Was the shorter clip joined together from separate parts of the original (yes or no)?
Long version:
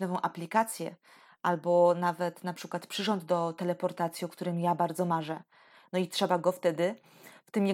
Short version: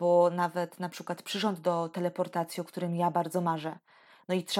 no